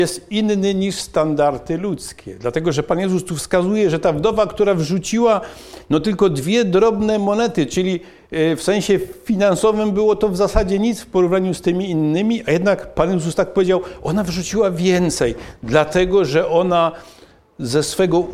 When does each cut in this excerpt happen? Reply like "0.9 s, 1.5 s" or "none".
none

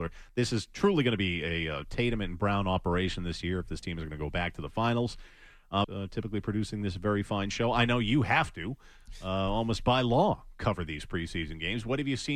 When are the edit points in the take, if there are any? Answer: 5.8 s

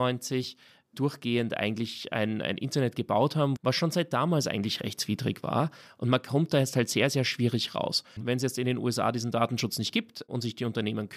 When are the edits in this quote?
3.6 s, 8.2 s

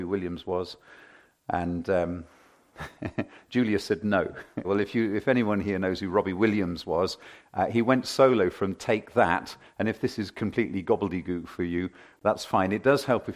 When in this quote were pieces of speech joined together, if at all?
4.6 s

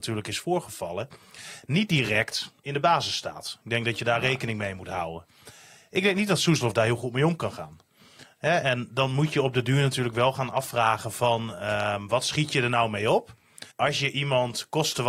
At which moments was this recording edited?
13.7 s

